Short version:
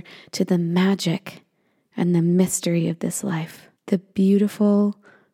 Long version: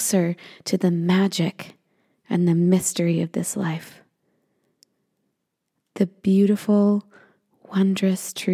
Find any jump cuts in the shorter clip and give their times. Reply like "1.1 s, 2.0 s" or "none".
3.8 s